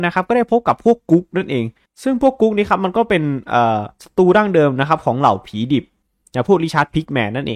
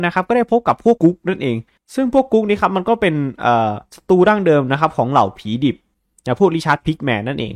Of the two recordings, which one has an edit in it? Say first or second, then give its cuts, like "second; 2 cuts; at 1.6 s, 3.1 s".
second; 1 cut; at 1.0 s